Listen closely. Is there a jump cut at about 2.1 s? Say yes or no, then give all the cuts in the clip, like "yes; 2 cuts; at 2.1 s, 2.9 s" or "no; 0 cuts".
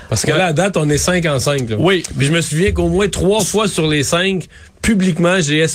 no; 0 cuts